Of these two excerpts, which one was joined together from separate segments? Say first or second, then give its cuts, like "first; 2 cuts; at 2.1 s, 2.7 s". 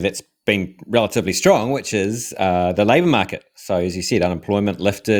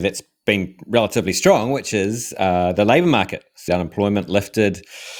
second; 1 cut; at 3.7 s